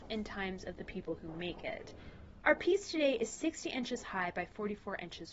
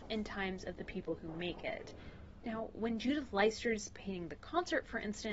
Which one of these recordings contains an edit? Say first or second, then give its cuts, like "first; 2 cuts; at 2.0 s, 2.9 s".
first; 1 cut; at 2.4 s